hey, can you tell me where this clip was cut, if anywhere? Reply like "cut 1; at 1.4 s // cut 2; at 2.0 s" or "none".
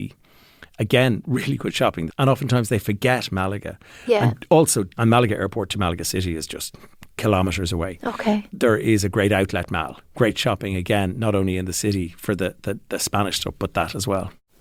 cut 1; at 2.1 s // cut 2; at 4.9 s // cut 3; at 10.1 s

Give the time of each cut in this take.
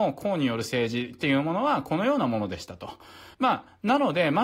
cut 1; at 3.3 s

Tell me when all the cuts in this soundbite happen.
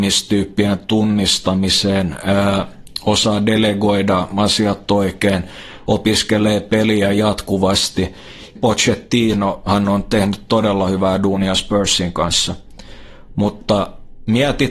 cut 1; at 8.6 s

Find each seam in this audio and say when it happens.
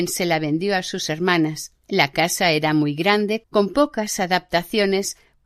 cut 1; at 1.8 s // cut 2; at 3.4 s

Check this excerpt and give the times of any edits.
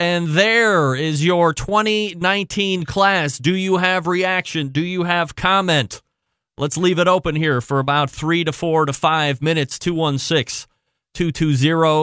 none

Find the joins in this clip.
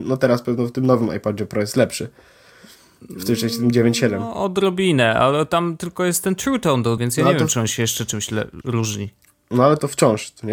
cut 1; at 7.0 s // cut 2; at 8.6 s

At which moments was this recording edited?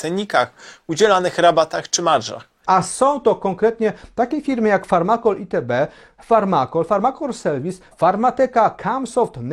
cut 1; at 2.6 s // cut 2; at 7.9 s

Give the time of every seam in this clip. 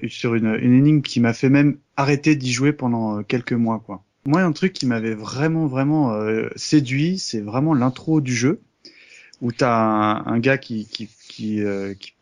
none

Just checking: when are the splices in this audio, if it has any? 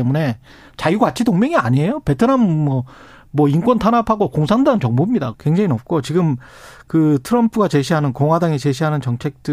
cut 1; at 5.3 s

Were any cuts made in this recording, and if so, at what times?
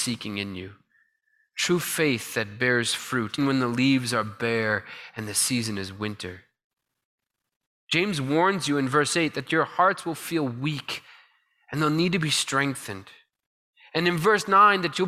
cut 1; at 3.4 s

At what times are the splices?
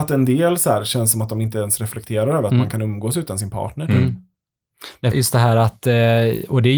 cut 1; at 5.1 s

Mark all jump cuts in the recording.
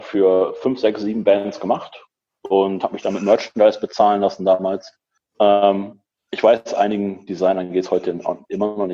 cut 1; at 5.2 s

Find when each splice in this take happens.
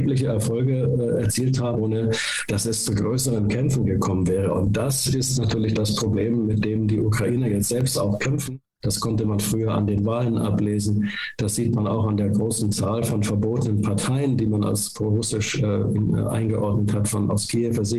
cut 1; at 1.8 s // cut 2; at 8.8 s

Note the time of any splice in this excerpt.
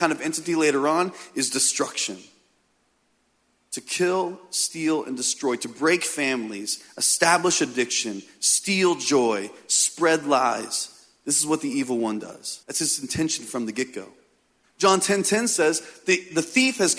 cut 1; at 12.6 s // cut 2; at 14.6 s

